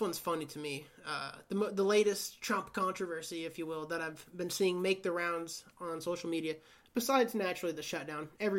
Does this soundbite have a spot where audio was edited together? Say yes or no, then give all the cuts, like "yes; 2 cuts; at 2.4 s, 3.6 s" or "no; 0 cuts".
no; 0 cuts